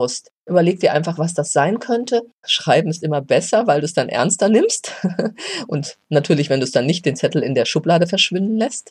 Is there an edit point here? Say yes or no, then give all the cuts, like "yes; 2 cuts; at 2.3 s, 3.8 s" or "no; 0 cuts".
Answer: yes; 1 cut; at 2.4 s